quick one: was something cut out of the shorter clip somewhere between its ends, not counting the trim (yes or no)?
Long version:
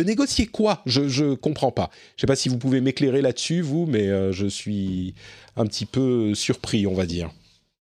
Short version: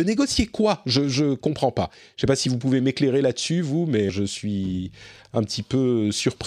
yes